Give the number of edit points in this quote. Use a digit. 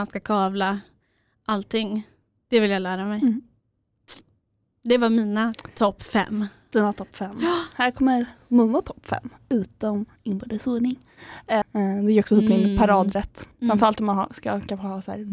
2